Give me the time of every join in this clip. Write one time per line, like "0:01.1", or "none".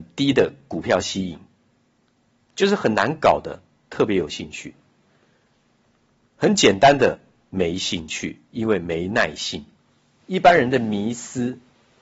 0:10.2

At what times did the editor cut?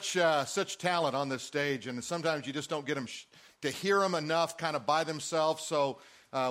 none

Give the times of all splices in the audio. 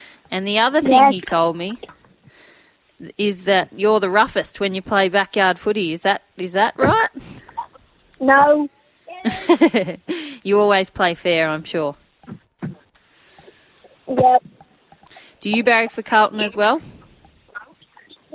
none

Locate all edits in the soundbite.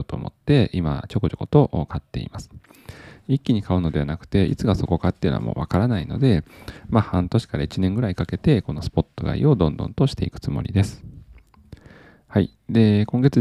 none

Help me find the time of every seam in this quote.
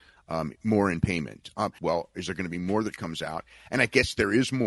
0:01.8

